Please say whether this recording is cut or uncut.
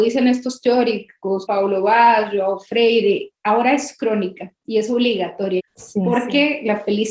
cut